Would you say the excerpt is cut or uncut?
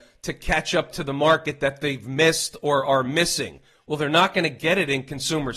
uncut